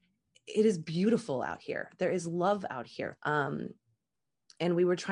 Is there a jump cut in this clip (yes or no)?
yes